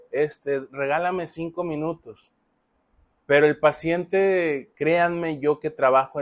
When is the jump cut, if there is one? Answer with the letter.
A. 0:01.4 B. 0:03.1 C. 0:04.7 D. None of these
B